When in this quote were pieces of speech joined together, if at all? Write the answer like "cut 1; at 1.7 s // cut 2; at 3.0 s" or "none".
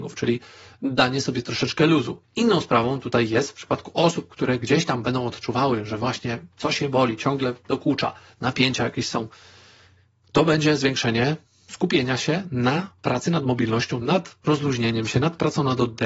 cut 1; at 2.2 s // cut 2; at 14.0 s

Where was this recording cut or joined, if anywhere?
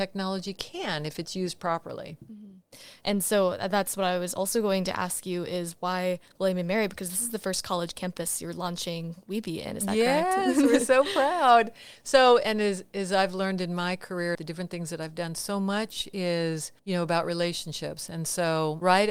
cut 1; at 14.3 s // cut 2; at 16.8 s

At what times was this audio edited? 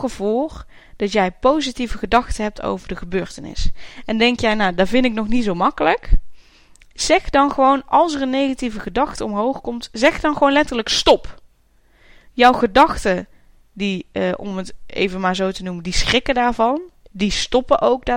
none

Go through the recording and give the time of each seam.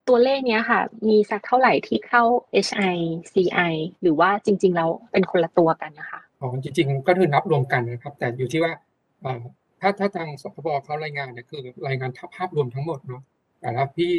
cut 1; at 6.3 s

